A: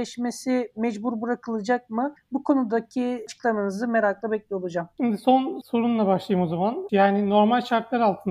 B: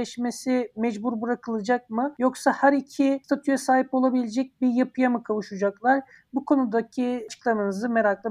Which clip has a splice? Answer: A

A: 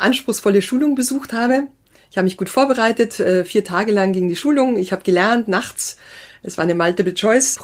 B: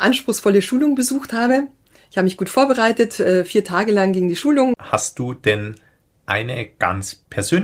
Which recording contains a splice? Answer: B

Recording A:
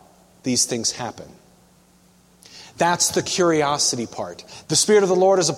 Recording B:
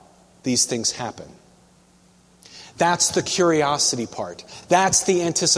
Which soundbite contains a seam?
A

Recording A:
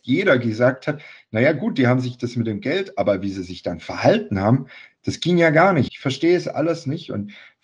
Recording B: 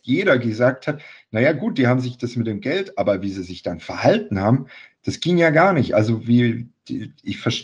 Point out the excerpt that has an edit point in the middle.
A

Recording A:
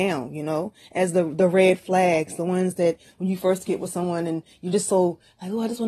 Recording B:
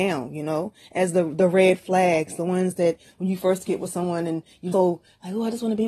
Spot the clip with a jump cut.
B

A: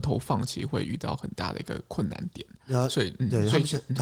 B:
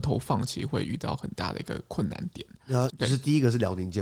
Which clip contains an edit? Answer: B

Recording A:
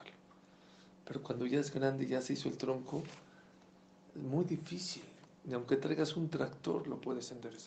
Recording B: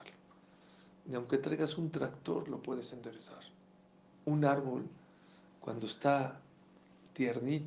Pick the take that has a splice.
B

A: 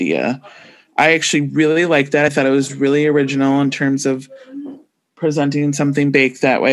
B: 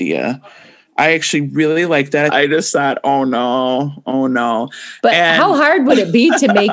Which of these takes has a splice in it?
B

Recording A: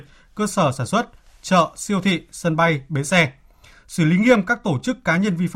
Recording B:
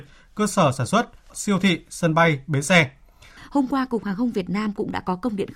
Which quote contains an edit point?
B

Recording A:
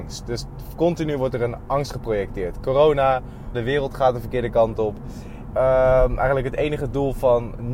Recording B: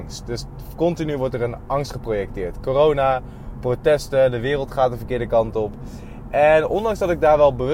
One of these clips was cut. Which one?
A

